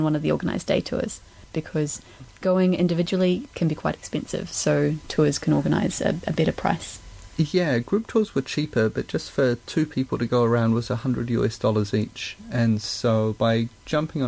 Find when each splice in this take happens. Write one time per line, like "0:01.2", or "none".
0:01.5